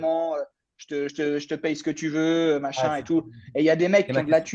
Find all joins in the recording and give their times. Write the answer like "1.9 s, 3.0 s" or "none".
none